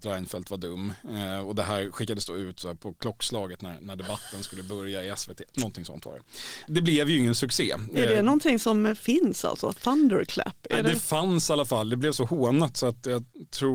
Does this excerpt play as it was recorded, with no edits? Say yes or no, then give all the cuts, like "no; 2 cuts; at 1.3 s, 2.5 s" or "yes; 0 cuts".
yes; 0 cuts